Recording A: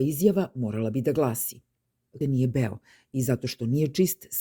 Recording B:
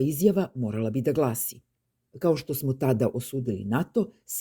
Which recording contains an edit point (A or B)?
A